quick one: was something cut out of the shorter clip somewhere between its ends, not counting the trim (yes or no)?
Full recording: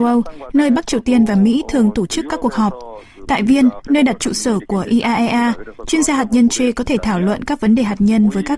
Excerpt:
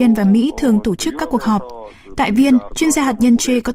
yes